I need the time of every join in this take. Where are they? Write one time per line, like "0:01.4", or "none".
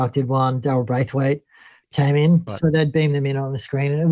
0:02.5